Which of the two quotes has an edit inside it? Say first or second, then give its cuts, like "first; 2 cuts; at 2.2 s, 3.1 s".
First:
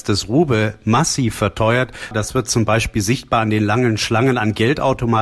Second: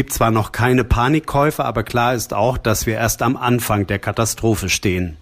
first; 1 cut; at 2.1 s